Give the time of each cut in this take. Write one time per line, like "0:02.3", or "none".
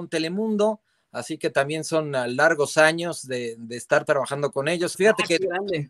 0:04.9

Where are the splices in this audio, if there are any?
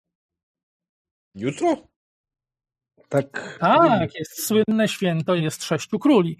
0:03.6
0:05.4

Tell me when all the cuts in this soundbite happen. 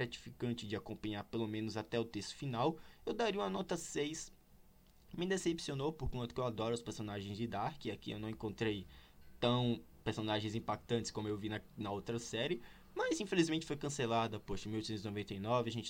none

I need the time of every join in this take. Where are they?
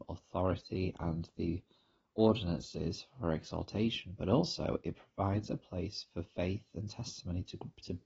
none

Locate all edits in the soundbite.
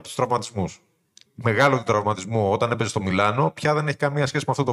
0:01.3

